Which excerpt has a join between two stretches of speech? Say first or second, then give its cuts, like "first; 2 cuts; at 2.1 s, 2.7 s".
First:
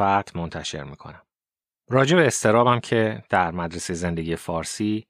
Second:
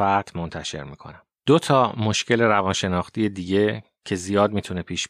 second; 1 cut; at 1.4 s